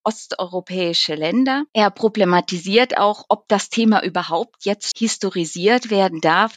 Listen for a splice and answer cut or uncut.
cut